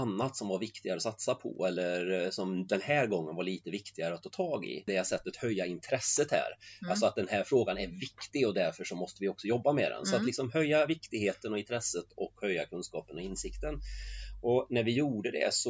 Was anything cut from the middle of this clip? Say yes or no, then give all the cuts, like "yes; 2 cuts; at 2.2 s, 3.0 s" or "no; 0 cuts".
yes; 1 cut; at 4.9 s